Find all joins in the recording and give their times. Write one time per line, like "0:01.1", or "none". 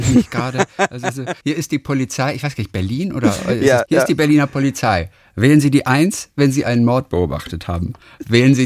0:01.4
0:03.9